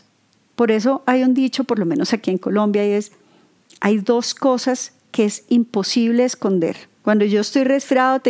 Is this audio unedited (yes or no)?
no